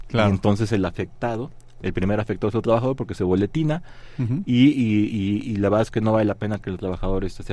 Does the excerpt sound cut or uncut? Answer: uncut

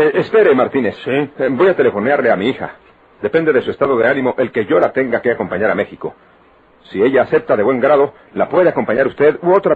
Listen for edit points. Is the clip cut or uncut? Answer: uncut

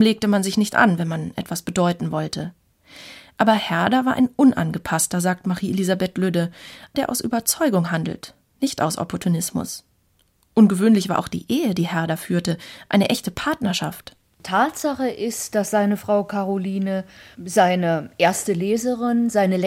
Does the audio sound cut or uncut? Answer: cut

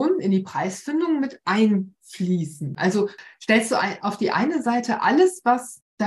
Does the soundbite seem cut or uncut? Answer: cut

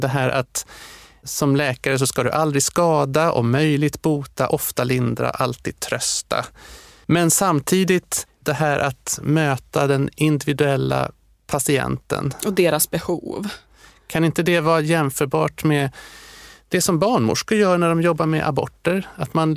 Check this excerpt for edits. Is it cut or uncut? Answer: uncut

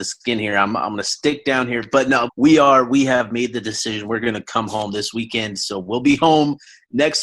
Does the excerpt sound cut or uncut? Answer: cut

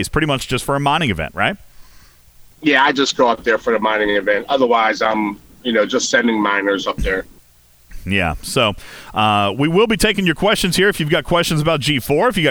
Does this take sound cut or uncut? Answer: cut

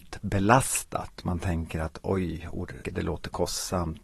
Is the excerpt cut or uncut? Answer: cut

